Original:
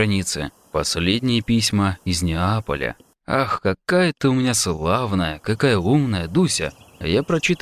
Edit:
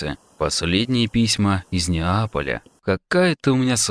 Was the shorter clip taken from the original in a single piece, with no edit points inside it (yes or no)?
no